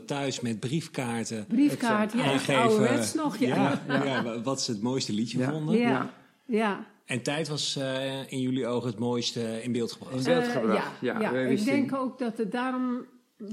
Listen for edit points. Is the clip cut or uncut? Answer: uncut